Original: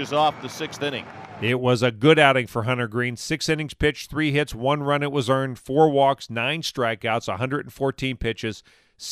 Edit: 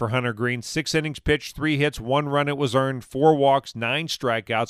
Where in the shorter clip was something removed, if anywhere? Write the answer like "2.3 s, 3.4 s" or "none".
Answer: none